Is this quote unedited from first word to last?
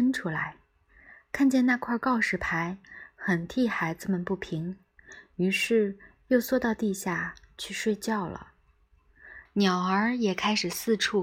no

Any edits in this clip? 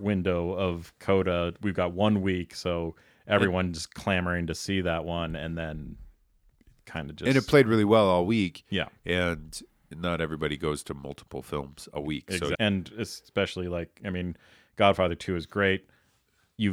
yes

